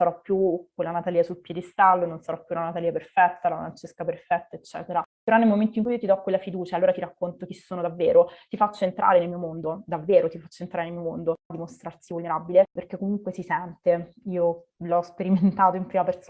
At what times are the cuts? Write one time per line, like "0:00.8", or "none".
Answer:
0:11.5
0:12.8